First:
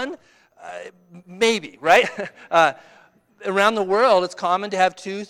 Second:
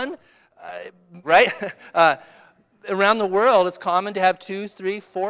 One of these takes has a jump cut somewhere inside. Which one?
second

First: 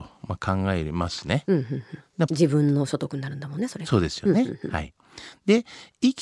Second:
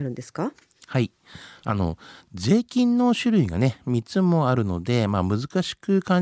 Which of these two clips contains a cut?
first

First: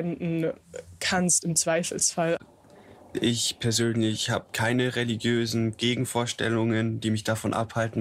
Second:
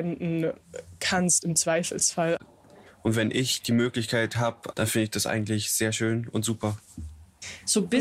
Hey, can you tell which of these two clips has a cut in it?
second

